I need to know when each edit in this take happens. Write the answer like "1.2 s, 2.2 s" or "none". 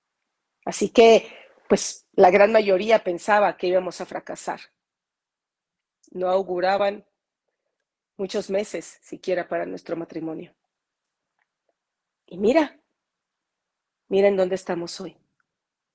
none